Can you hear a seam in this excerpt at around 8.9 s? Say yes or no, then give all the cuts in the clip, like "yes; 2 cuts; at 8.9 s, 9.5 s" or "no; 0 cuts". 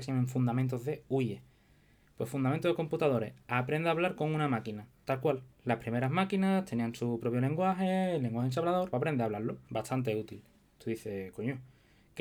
yes; 2 cuts; at 8.9 s, 10.8 s